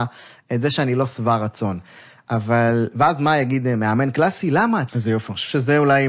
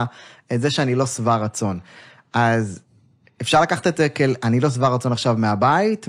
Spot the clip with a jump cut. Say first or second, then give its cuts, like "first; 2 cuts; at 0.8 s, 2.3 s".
first; 2 cuts; at 2.2 s, 4.9 s